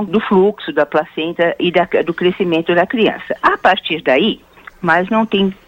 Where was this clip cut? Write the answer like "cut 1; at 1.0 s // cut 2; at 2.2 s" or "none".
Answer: cut 1; at 3.4 s // cut 2; at 4.7 s